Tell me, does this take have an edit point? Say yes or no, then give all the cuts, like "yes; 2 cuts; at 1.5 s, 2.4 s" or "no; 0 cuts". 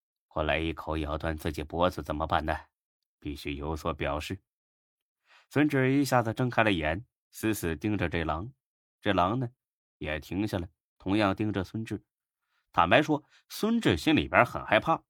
no; 0 cuts